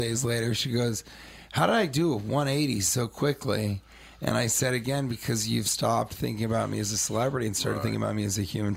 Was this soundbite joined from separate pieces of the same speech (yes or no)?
no